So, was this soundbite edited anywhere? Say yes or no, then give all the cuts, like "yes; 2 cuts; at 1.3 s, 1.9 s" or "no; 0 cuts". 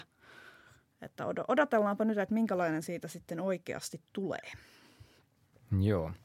no; 0 cuts